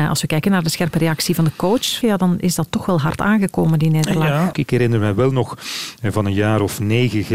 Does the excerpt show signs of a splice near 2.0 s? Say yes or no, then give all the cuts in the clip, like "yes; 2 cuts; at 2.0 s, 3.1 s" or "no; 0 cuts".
yes; 2 cuts; at 2.0 s, 4.5 s